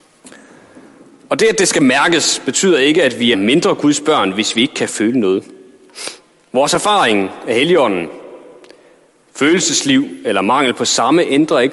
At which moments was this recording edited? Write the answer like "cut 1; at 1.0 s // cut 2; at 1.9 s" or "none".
cut 1; at 3.3 s